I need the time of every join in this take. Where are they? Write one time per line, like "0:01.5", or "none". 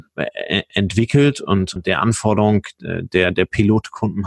0:01.8